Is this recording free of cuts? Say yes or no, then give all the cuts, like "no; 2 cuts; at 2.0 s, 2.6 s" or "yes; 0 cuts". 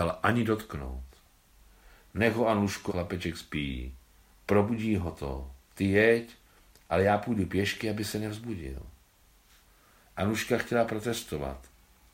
no; 2 cuts; at 2.9 s, 4.3 s